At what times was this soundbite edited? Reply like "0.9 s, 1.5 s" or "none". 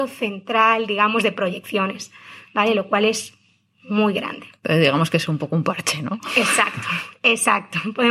none